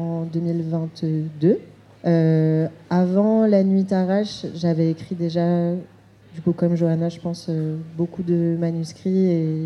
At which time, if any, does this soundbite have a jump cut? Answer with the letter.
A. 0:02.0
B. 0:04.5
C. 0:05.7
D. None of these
A